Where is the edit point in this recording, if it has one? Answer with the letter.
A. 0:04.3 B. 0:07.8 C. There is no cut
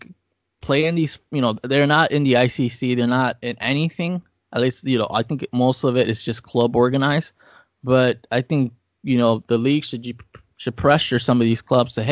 C